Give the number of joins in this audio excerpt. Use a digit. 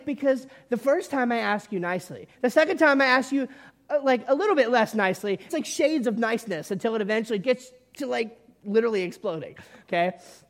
2